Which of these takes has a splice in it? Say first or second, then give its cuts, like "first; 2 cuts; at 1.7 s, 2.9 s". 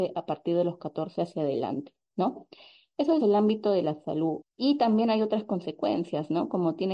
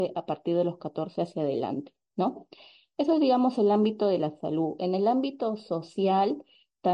first; 2 cuts; at 3.2 s, 4.4 s